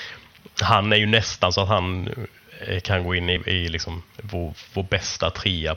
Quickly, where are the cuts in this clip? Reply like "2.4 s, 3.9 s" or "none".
none